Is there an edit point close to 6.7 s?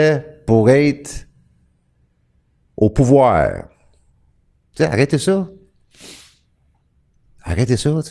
no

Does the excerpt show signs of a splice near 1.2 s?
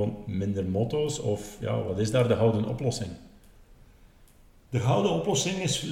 no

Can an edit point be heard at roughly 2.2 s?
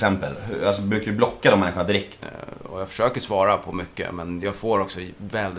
yes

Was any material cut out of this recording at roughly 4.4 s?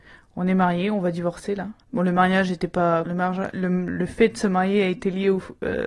no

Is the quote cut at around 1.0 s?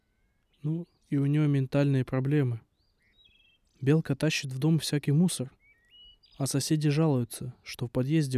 yes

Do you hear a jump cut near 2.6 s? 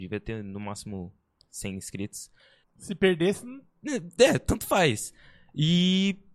yes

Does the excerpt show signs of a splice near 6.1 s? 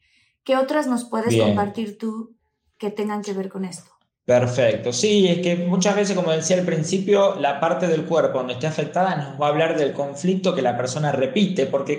no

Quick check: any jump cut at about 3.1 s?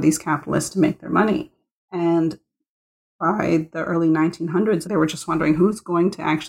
no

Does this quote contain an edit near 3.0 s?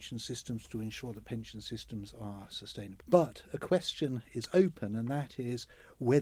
yes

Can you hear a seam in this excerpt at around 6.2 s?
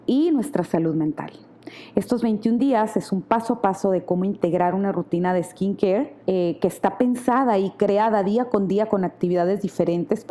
yes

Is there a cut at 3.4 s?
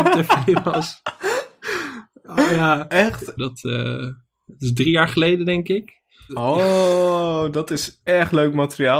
yes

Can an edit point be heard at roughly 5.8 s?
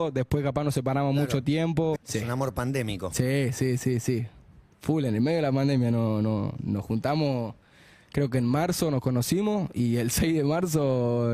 no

